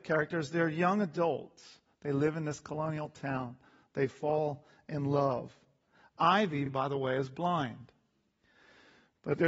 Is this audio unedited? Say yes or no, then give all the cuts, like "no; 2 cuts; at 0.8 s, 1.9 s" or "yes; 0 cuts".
yes; 0 cuts